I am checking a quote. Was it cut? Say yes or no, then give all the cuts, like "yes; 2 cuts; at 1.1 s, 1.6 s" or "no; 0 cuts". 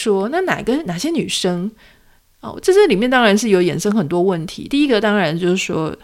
no; 0 cuts